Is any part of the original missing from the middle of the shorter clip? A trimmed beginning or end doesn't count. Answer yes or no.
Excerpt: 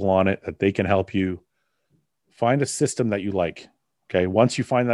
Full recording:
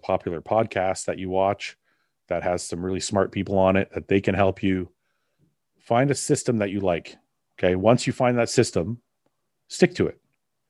no